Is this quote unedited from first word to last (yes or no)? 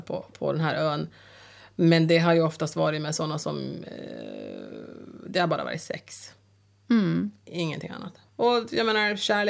yes